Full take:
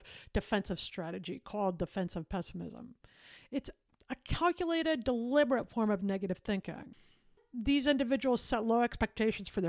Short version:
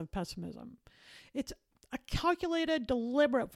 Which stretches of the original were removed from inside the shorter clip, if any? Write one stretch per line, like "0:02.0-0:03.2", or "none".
none